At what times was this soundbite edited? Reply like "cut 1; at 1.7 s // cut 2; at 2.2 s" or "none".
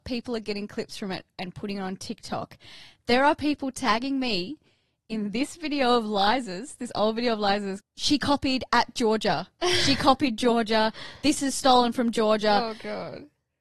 cut 1; at 7.8 s

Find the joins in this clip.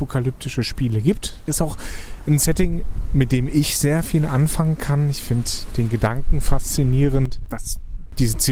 cut 1; at 1.5 s

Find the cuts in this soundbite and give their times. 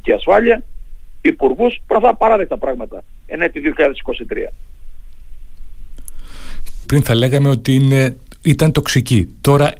cut 1; at 6.8 s

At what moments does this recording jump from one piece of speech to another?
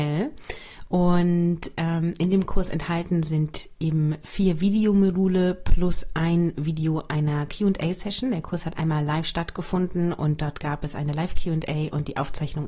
none

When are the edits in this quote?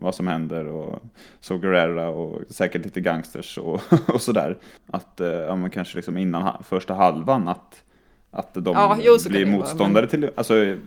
cut 1; at 4.8 s

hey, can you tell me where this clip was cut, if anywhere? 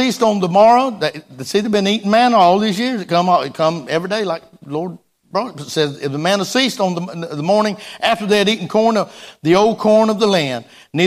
none

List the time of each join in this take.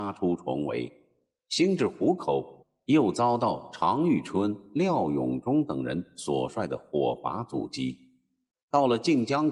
cut 1; at 8.6 s

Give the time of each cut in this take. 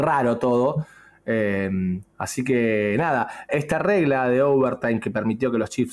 cut 1; at 2.1 s // cut 2; at 3.5 s

